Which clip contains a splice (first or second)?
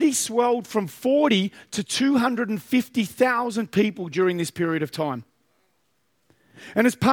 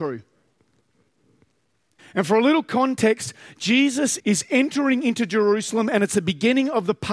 second